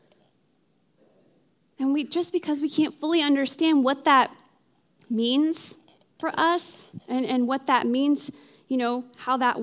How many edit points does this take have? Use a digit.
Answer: 0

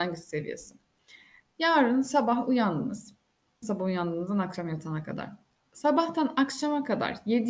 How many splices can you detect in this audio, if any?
1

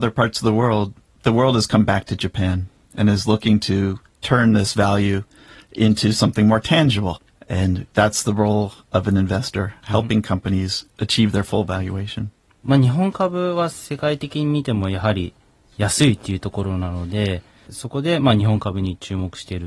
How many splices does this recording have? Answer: 0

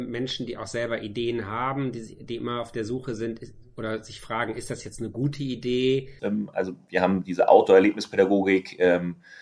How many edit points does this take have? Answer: 1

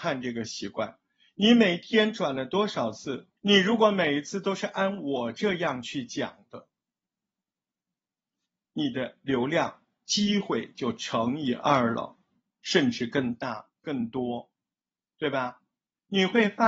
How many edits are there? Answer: 1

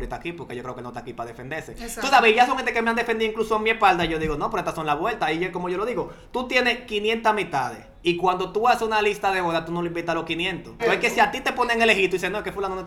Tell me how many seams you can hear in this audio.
2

